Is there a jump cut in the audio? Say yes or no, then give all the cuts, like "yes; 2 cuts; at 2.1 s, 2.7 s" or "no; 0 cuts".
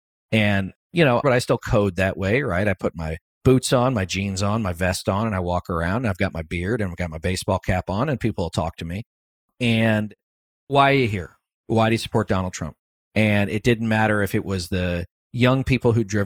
yes; 1 cut; at 1.2 s